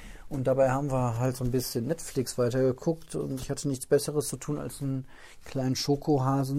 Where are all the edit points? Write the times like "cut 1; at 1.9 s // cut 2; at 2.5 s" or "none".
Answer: none